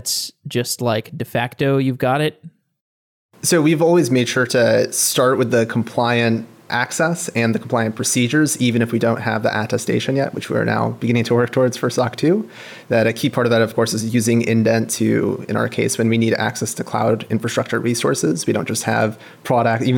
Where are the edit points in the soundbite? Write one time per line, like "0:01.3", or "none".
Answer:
none